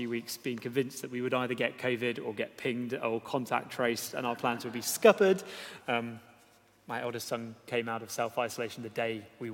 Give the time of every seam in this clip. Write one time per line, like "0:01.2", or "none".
0:05.8